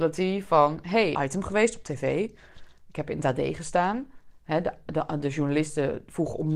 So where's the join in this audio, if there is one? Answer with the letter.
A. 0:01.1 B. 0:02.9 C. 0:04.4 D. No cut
A